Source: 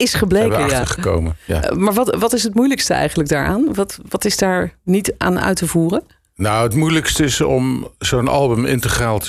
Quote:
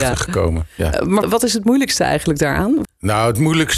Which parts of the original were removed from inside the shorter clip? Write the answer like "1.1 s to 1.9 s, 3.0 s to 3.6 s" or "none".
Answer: 1.9 s to 2.1 s, 3.7 s to 6.2 s